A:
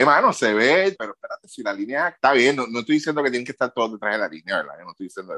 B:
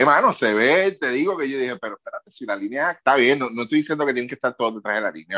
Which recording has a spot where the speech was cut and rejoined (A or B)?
A